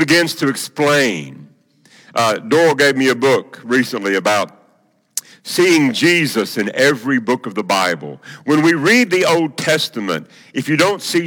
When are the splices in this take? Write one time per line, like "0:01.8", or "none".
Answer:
none